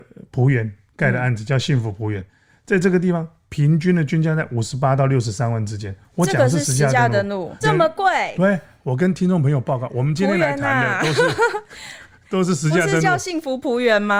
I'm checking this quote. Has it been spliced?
yes; 1 cut; at 7.6 s

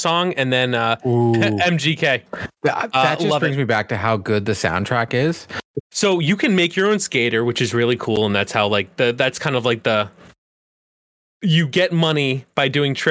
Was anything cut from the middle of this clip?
yes; 1 cut; at 5.8 s

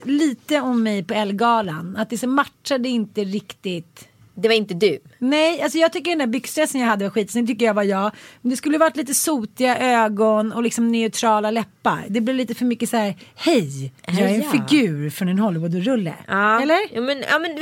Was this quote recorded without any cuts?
yes; 0 cuts

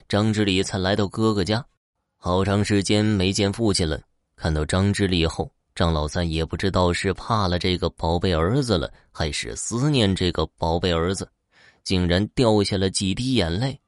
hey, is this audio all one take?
yes; 0 cuts

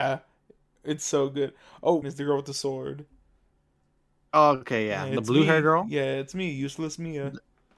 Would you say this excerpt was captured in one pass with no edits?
no; 1 cut; at 2.0 s

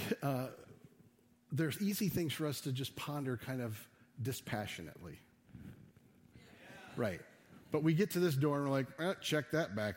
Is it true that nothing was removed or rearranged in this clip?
no; 1 cut; at 6.3 s

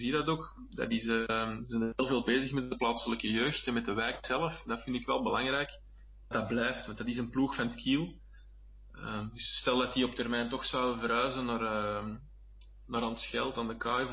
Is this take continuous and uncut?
no; 1 cut; at 6.3 s

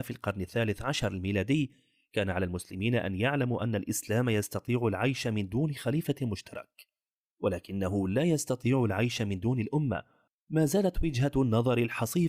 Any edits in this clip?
no; 0 cuts

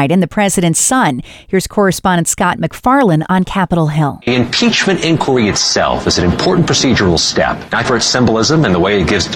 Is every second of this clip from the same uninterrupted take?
no; 1 cut; at 7.8 s

